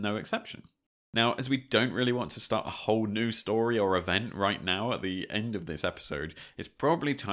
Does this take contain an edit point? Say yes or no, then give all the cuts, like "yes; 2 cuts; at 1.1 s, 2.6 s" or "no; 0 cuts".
no; 0 cuts